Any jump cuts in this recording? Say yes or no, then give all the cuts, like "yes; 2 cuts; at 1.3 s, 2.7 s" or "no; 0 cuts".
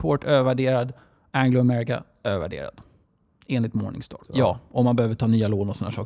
yes; 1 cut; at 4.2 s